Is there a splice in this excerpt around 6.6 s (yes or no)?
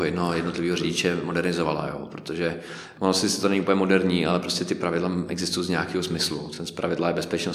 no